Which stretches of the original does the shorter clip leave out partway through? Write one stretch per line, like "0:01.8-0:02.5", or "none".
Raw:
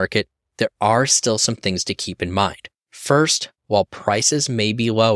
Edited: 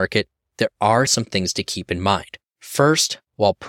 0:01.1-0:01.4